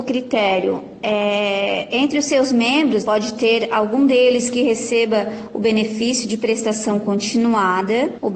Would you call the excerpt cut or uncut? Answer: cut